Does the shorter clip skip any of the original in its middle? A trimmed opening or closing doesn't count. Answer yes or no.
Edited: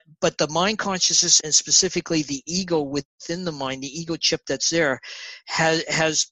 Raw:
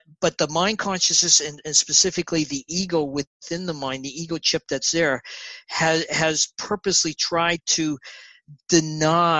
yes